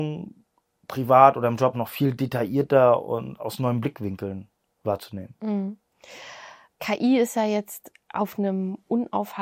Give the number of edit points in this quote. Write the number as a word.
one